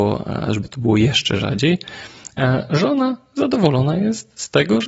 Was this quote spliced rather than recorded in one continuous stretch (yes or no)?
no